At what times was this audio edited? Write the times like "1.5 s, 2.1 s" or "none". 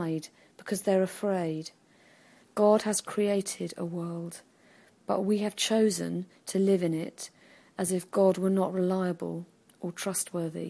2.4 s